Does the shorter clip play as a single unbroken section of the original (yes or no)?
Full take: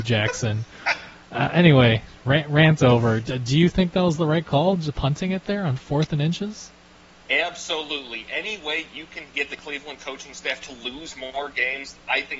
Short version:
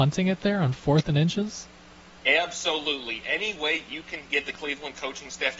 yes